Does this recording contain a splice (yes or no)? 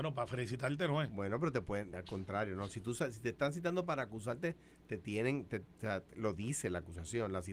no